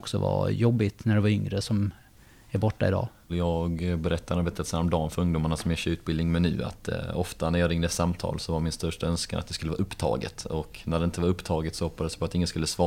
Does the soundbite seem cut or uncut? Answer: cut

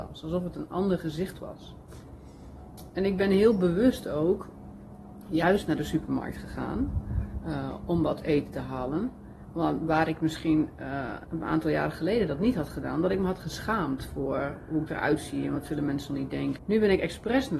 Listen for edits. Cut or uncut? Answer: cut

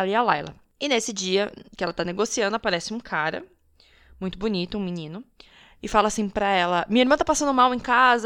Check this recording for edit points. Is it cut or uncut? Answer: uncut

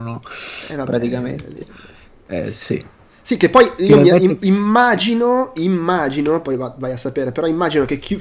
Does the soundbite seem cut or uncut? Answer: uncut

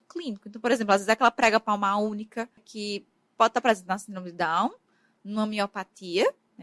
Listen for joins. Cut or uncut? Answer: cut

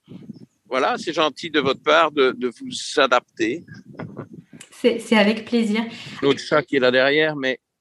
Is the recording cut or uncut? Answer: cut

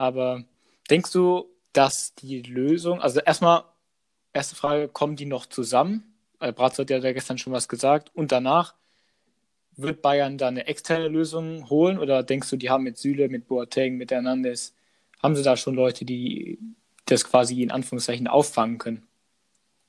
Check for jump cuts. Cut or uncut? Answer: cut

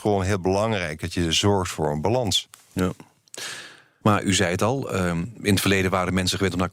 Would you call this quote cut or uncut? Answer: cut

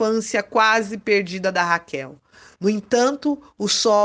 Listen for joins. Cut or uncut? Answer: uncut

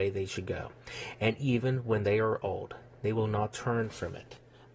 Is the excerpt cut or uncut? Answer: uncut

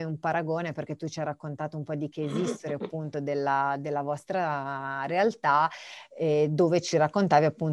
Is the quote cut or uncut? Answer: uncut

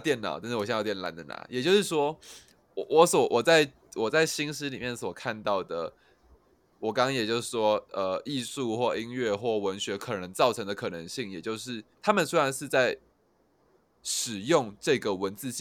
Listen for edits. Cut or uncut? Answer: cut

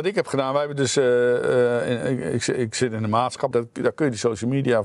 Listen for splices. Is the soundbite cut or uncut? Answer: cut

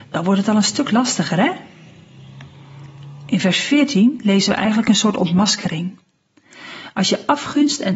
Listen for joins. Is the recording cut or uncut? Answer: uncut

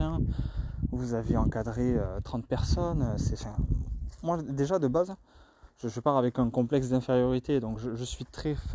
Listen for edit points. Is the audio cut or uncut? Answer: uncut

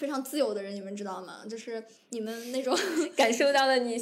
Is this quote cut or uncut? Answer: uncut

